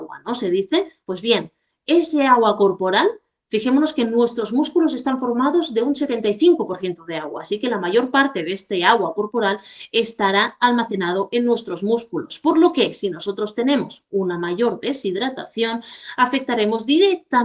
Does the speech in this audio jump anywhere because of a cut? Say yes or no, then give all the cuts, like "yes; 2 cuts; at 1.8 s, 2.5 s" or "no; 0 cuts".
no; 0 cuts